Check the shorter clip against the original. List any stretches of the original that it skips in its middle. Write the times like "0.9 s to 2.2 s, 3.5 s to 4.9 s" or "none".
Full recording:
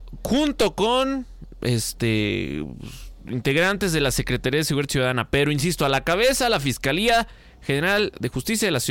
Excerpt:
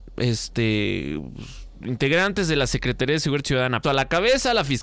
5.3 s to 5.8 s